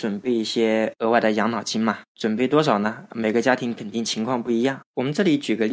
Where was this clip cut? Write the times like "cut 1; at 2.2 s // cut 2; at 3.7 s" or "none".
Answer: none